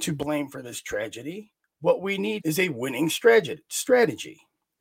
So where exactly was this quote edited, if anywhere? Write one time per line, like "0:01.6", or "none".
0:02.4

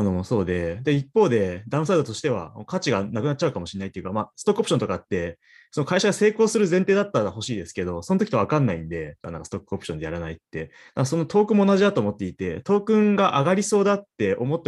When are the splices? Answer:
0:09.2

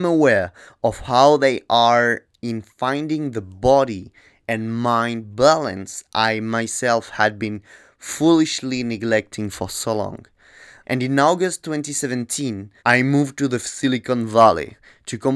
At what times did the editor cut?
0:10.8
0:12.8

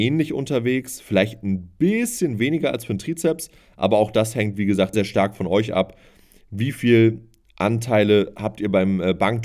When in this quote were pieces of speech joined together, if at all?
0:04.9

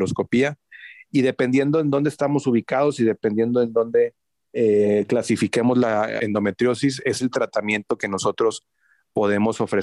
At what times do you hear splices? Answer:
0:06.2

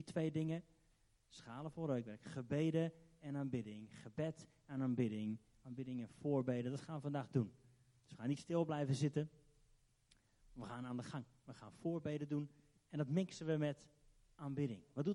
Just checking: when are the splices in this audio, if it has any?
none

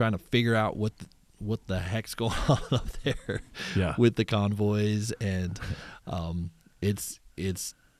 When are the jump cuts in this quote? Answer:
none

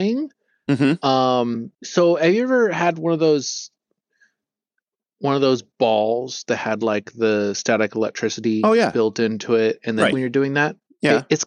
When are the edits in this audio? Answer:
0:01.7
0:10.1

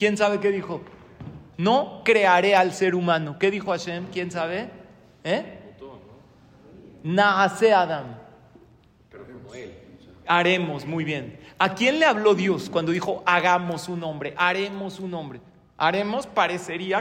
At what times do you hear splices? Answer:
none

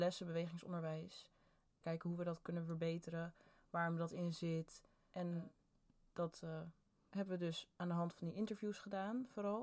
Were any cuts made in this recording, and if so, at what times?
0:01.8

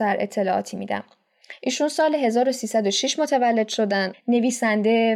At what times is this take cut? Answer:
0:04.1

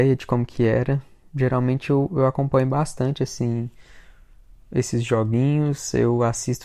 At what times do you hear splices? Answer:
none

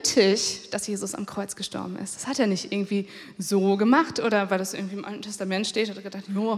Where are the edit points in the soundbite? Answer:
none

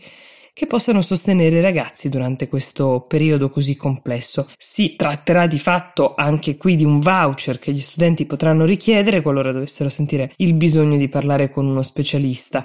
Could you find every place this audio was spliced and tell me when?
0:04.5
0:10.3

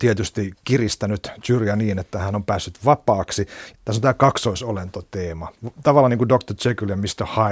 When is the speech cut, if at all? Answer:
0:03.7

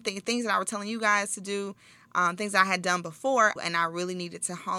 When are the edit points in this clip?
0:03.6

